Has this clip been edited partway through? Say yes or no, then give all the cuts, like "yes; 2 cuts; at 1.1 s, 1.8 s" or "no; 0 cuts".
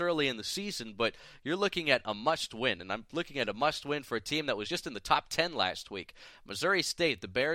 no; 0 cuts